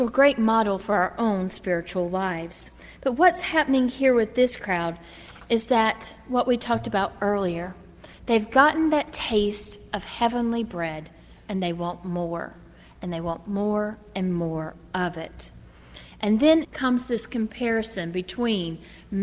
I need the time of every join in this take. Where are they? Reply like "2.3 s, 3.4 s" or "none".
16.6 s